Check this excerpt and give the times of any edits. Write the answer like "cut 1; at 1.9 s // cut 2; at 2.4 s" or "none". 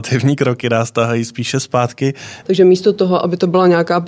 cut 1; at 2.4 s